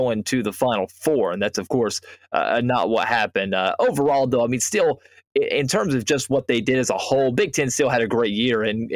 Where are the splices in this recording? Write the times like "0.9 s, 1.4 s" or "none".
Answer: none

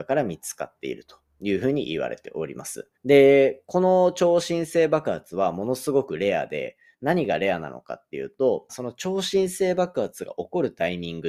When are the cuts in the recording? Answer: 2.9 s, 8.7 s

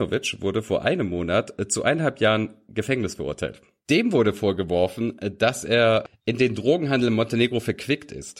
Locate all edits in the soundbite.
none

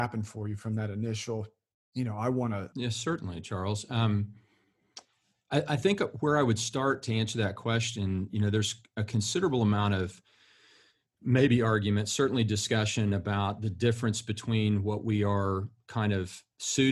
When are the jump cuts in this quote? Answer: 2.7 s

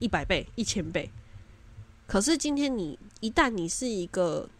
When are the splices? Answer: 2.0 s

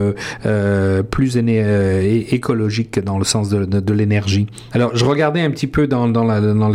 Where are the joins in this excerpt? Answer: 4.7 s

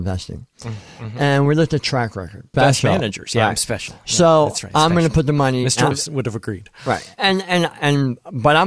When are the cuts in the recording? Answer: 2.5 s, 5.9 s

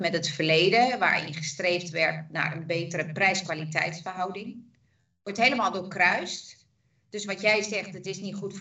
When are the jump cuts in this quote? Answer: none

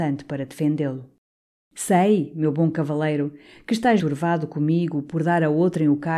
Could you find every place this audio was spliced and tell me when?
4.0 s

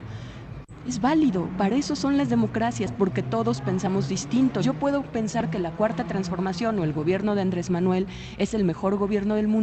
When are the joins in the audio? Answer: 4.6 s

